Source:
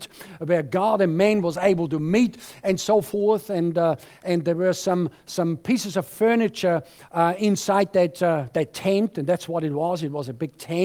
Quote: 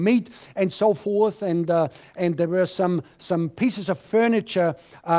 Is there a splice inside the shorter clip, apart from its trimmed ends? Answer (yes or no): no